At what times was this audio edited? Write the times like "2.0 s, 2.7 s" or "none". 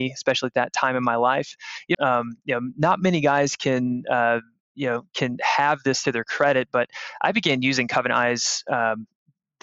1.9 s